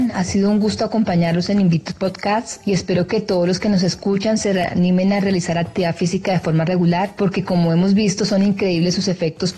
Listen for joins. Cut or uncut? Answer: uncut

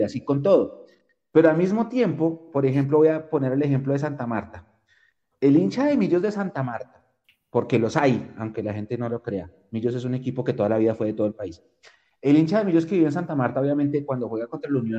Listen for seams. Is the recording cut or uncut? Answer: uncut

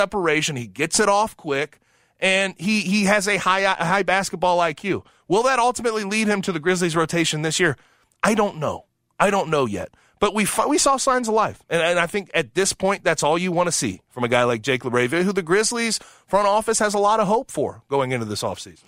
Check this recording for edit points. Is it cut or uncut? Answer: uncut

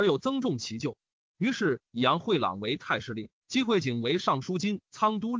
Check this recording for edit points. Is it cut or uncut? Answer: uncut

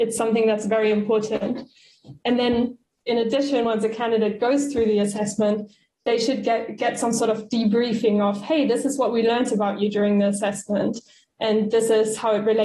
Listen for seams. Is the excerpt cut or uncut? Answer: uncut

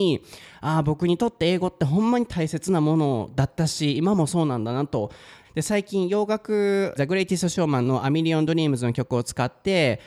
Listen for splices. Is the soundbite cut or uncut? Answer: cut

